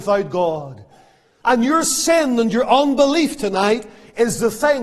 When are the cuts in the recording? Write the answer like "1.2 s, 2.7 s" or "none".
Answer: 1.4 s